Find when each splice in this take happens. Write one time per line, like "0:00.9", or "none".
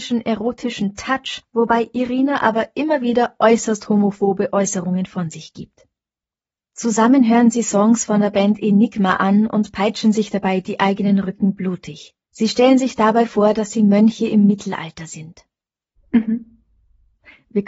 0:12.2
0:16.0